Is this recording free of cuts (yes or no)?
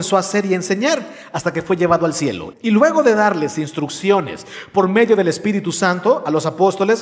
no